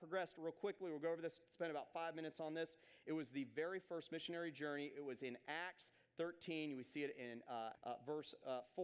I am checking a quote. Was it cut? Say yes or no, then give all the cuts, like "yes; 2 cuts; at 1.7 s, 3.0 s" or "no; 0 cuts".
yes; 1 cut; at 7.8 s